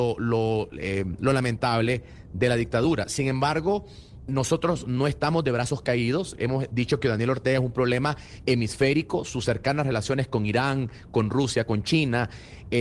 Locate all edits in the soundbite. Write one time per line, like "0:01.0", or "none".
0:04.3